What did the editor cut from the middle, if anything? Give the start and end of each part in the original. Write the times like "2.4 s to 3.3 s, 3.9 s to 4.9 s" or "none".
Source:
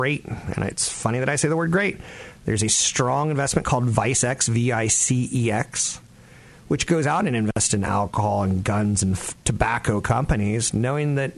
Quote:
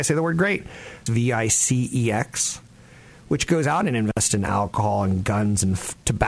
2.4 s to 4.5 s